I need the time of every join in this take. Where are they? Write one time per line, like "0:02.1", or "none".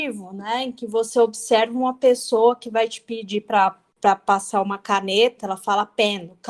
0:05.4